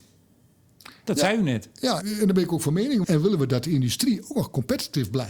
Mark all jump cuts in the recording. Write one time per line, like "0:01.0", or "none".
0:02.0
0:03.0